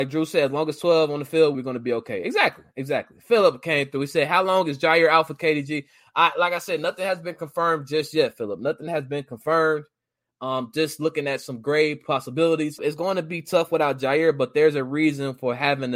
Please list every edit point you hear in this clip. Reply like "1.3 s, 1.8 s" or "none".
1.5 s, 12.8 s